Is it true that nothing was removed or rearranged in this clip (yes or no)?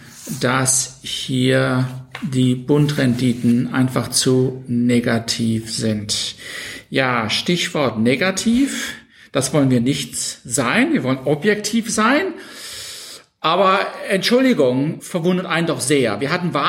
no